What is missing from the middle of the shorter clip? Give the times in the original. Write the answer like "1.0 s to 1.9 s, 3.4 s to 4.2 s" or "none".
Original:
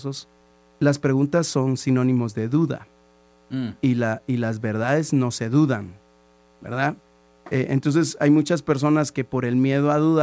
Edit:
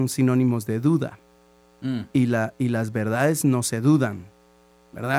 none